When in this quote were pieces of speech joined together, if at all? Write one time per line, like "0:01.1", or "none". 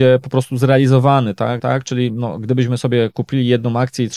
0:01.6

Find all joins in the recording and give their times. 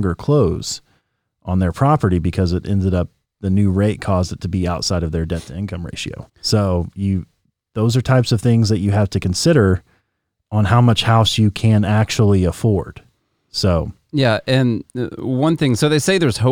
0:06.3

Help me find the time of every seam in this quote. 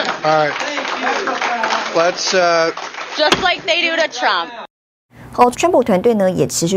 0:05.5

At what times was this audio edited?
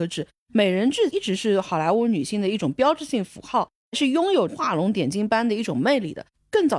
none

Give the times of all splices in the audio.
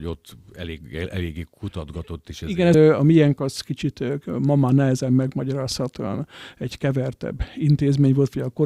0:02.7

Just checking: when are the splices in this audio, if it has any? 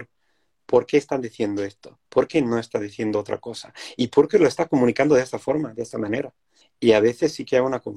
0:02.0
0:06.6

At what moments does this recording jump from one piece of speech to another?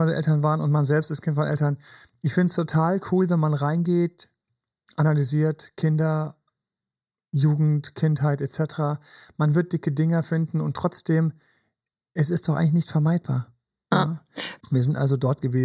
0:14.6

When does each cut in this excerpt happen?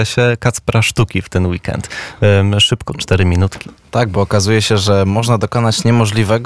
0:02.9

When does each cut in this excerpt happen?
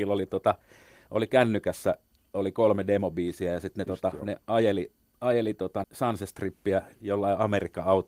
0:05.8

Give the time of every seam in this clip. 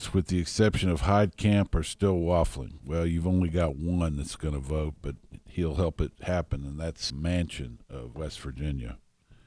0:07.1
0:08.1

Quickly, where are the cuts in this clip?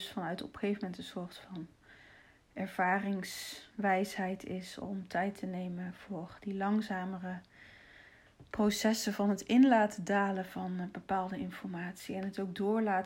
0:04.8

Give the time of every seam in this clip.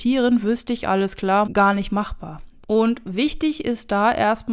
0:01.4
0:02.6

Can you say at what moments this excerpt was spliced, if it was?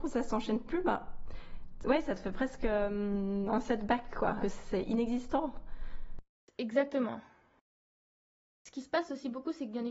0:04.4

